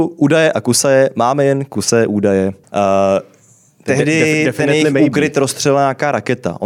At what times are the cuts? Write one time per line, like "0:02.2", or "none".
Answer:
0:02.6